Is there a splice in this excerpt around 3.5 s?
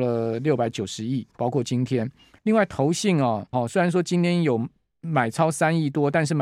yes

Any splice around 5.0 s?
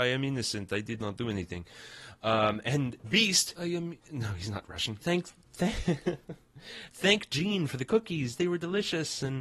yes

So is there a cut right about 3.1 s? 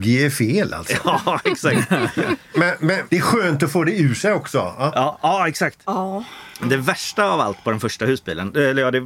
yes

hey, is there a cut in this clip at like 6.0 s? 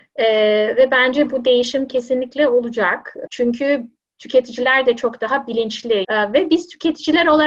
yes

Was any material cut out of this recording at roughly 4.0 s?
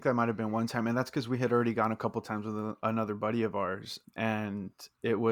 yes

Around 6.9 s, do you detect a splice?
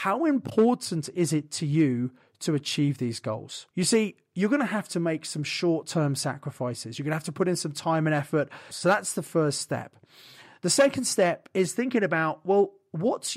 no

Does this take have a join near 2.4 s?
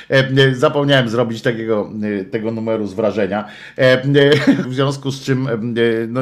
no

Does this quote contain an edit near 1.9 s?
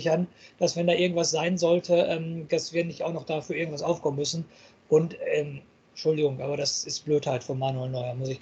no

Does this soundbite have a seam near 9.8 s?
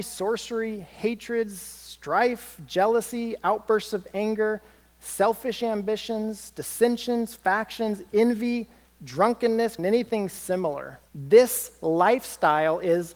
yes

